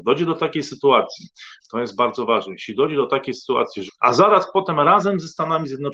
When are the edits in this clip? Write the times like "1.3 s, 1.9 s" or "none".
1.6 s, 3.9 s

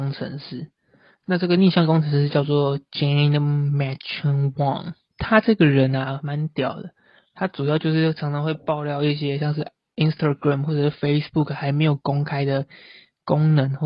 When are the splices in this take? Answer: none

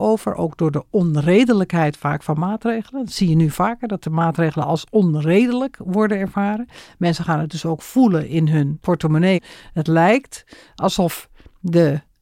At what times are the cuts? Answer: none

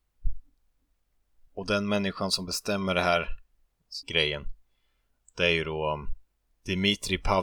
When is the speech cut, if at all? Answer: 1.5 s, 4.0 s

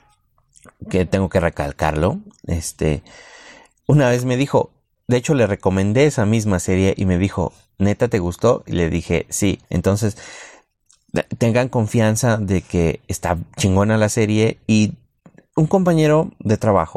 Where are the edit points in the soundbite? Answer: 9.6 s

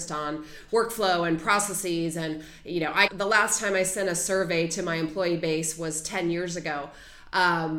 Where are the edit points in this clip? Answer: 3.1 s

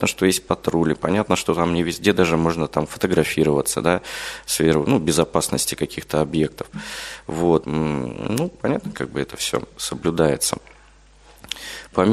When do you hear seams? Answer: 7.6 s, 8.9 s

